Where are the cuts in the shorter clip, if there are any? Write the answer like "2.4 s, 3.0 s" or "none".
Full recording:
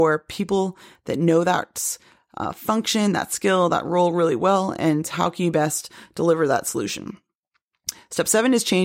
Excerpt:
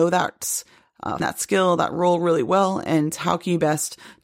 1.2 s